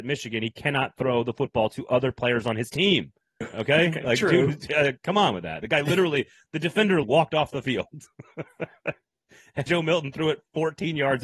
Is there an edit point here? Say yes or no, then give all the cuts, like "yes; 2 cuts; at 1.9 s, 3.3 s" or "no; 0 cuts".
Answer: yes; 3 cuts; at 3.4 s, 7.0 s, 9.7 s